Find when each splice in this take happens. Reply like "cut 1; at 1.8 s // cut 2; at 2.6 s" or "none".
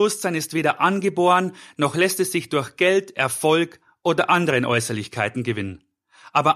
none